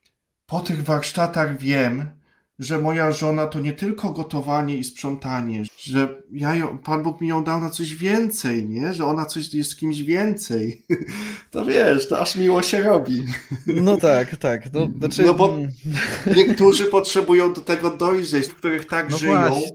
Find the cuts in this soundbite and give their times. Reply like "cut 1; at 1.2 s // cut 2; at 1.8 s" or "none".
cut 1; at 5.7 s // cut 2; at 14.0 s // cut 3; at 18.5 s